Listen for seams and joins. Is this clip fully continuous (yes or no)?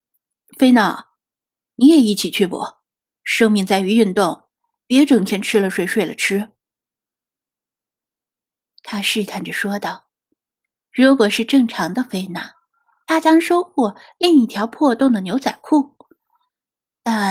yes